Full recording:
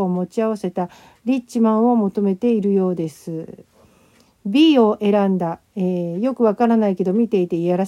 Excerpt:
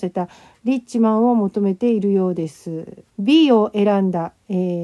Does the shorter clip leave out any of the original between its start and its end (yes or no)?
yes